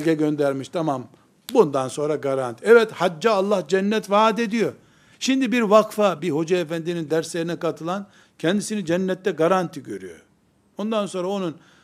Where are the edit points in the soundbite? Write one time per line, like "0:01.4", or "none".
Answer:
0:05.1
0:06.2